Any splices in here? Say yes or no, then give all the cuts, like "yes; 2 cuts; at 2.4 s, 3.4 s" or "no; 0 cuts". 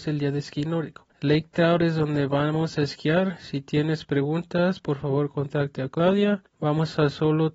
yes; 1 cut; at 1.1 s